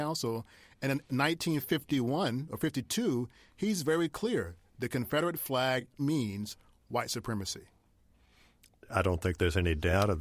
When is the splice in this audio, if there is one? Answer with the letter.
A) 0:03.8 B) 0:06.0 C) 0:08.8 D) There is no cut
B